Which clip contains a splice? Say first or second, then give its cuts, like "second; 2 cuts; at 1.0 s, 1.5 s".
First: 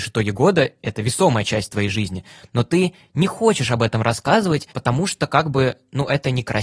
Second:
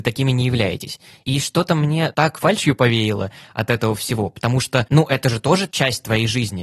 second; 1 cut; at 1.2 s